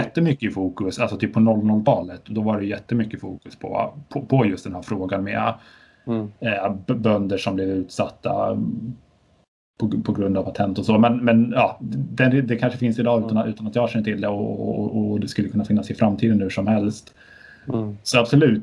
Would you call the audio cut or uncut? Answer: uncut